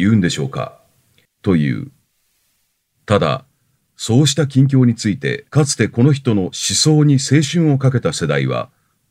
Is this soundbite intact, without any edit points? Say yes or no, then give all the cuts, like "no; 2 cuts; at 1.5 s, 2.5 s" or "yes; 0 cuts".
no; 2 cuts; at 1.2 s, 5.5 s